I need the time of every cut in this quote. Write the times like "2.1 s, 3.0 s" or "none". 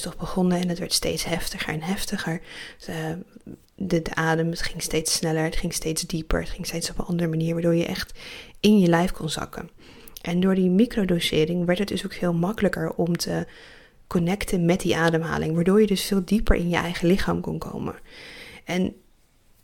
3.6 s